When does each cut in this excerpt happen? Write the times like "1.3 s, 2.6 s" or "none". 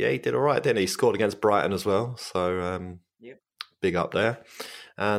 none